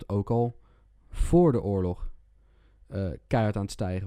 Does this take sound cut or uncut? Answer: uncut